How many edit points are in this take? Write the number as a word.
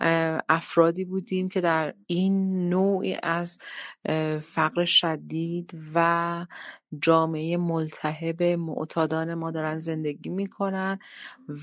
one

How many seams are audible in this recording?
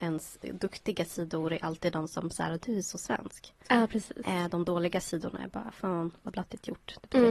zero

